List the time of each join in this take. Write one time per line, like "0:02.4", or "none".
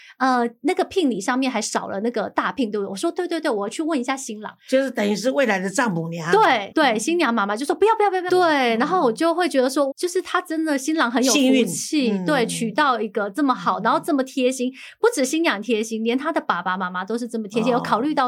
0:06.7
0:08.3
0:09.9

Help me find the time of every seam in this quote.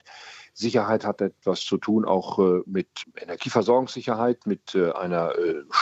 0:03.0

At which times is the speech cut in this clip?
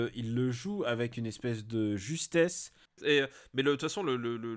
0:03.0

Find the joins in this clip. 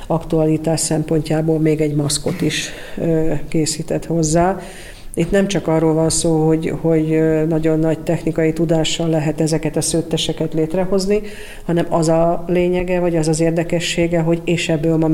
none

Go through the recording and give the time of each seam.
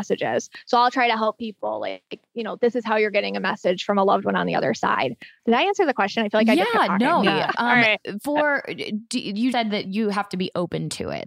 0:05.4
0:07.2
0:09.5

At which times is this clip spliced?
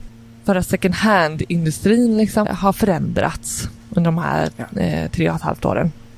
0:02.4

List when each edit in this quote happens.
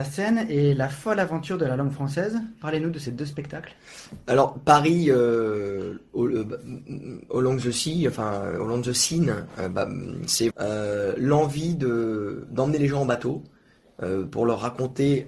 0:10.5

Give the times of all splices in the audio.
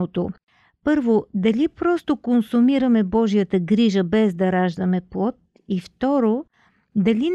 none

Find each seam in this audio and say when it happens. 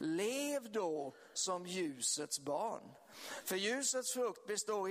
none

